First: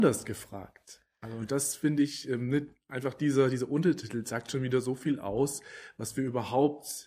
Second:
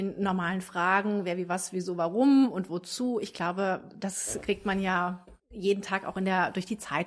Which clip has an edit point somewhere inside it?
second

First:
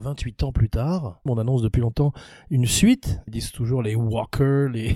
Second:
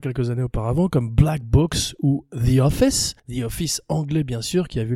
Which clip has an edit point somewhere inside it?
first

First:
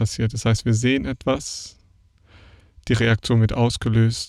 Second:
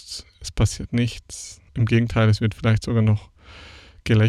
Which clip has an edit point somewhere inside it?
second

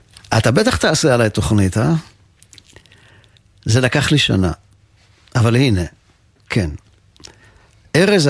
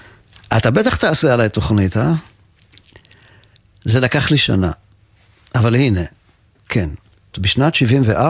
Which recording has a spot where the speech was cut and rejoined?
second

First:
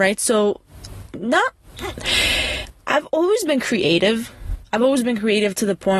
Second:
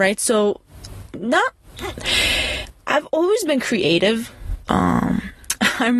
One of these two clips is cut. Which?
second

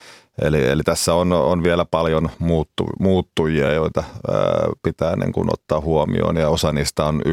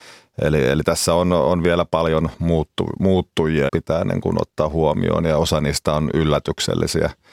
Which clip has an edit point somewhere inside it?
second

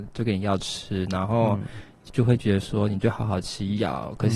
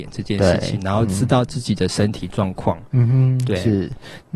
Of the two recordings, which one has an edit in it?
first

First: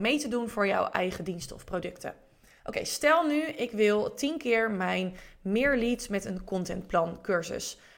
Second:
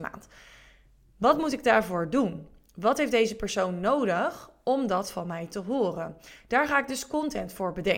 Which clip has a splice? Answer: first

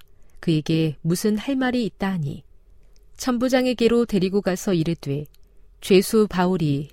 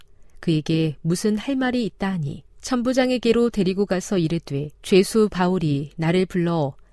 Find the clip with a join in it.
second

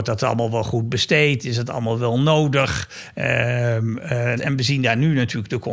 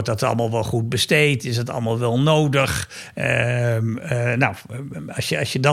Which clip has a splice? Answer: first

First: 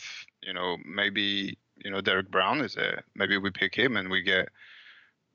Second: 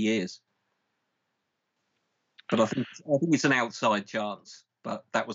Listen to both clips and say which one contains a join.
first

